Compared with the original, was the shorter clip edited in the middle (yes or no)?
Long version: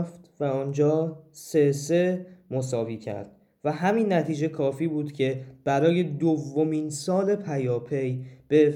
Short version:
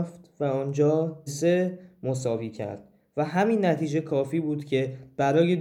yes